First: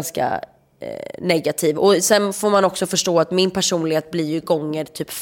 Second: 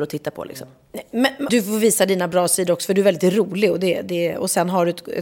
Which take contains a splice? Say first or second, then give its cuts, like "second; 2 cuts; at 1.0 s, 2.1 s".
second; 1 cut; at 1.5 s